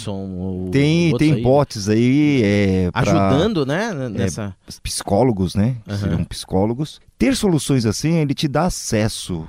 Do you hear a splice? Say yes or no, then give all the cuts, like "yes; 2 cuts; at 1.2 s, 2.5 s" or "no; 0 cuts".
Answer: yes; 1 cut; at 4.8 s